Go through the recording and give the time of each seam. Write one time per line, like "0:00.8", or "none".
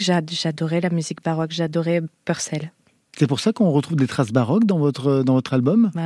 none